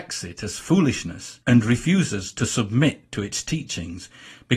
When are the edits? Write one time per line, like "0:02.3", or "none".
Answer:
0:01.4